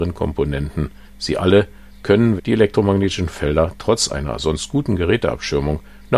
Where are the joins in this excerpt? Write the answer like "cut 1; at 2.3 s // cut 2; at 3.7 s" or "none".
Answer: cut 1; at 1.1 s // cut 2; at 2.4 s